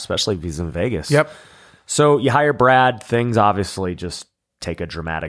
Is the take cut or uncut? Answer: uncut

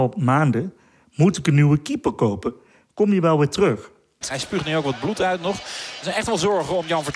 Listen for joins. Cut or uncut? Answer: cut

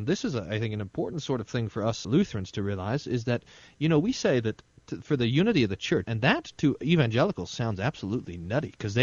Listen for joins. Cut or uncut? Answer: cut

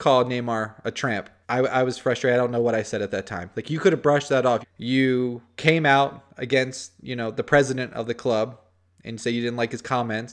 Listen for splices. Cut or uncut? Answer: cut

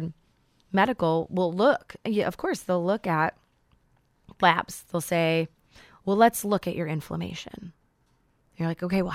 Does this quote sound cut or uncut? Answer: uncut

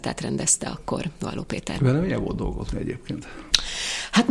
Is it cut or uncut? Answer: uncut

